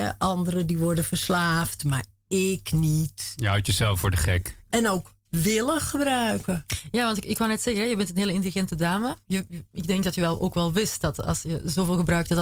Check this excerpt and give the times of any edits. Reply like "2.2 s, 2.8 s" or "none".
4.7 s